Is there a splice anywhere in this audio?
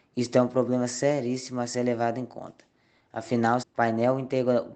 yes; 1 cut; at 3.6 s

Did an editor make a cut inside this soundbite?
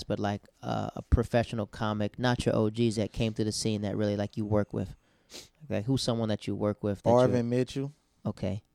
no; 0 cuts

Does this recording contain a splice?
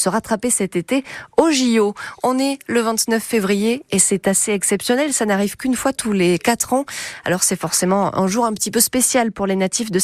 no; 0 cuts

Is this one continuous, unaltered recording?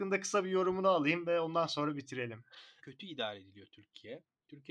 no; 1 cut; at 2.8 s

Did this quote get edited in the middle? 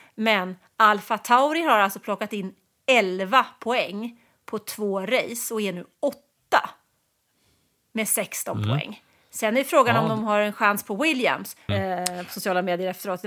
yes; 1 cut; at 11.7 s

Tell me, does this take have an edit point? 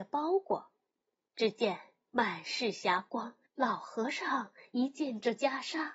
yes; 1 cut; at 3.5 s

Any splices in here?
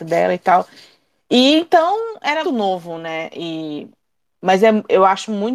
yes; 1 cut; at 2.4 s

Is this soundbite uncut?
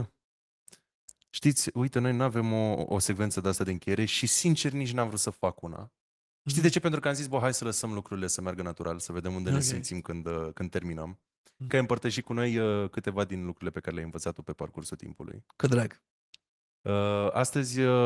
no; 1 cut; at 11.7 s

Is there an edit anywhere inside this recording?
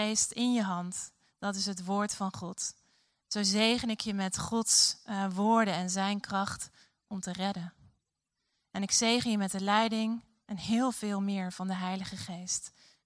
no; 0 cuts

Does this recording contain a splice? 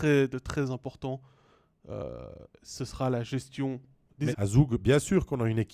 yes; 1 cut; at 4.3 s

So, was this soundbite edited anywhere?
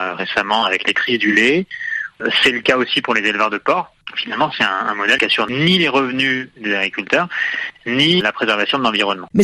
no; 0 cuts

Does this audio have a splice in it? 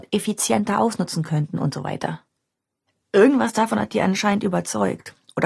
no; 0 cuts

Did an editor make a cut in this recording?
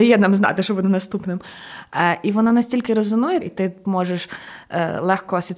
yes; 1 cut; at 3.4 s

